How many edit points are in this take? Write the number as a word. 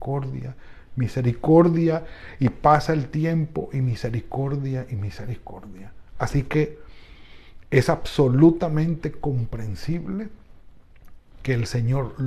zero